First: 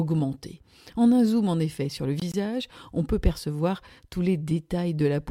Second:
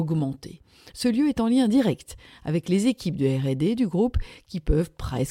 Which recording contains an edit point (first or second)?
second